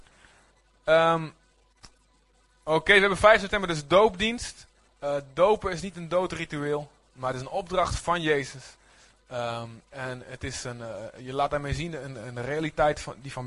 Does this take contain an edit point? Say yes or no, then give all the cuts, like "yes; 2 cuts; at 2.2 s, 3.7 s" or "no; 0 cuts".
no; 0 cuts